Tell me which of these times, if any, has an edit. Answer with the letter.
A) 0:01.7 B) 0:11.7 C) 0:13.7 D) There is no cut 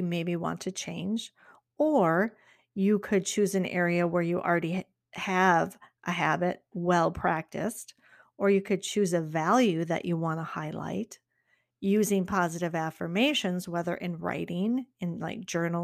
B